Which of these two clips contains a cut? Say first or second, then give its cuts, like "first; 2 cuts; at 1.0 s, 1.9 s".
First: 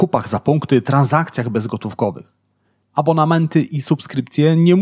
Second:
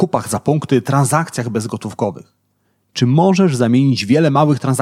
first; 1 cut; at 2.8 s